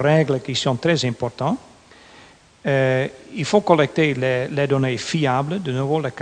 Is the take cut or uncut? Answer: uncut